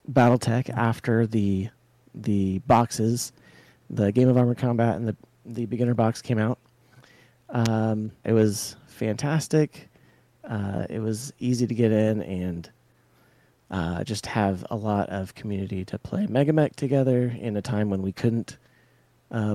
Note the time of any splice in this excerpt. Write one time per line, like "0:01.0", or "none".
0:08.2